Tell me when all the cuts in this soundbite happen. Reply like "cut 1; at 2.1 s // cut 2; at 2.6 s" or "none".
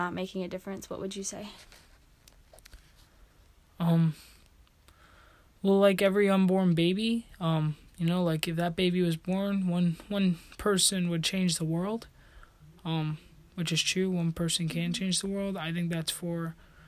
none